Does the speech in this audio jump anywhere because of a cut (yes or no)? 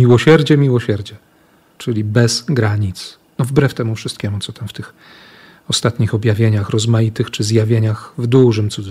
no